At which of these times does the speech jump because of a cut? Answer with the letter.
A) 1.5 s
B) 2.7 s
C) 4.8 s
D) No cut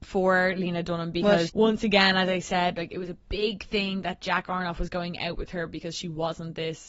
A